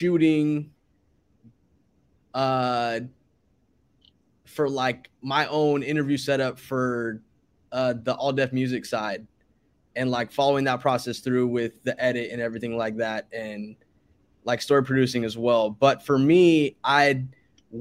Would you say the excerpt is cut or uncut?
cut